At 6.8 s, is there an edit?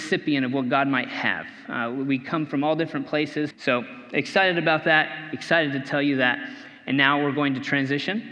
no; 1 cut; at 3.5 s

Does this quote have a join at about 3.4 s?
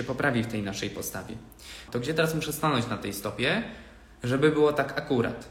no; 1 cut; at 1.9 s

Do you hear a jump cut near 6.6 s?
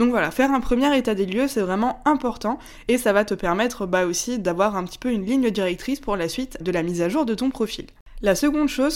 yes; 1 cut; at 6.6 s

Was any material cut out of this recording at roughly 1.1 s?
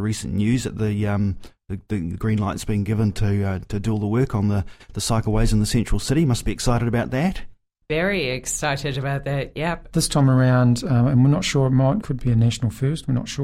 no; 2 cuts; at 9.9 s, 12.0 s

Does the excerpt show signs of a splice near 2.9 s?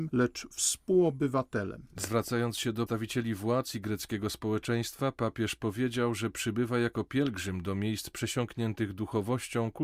yes; 1 cut; at 2.9 s

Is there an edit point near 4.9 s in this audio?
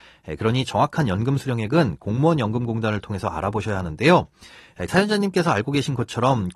yes; 1 cut; at 4.9 s

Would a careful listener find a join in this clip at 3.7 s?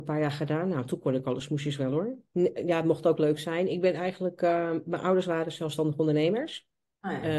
no; 1 cut; at 2.3 s

